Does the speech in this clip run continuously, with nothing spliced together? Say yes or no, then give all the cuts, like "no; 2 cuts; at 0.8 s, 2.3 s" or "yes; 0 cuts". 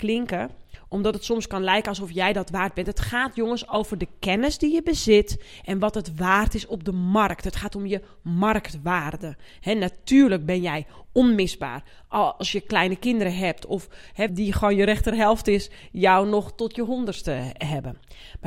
no; 1 cut; at 14.3 s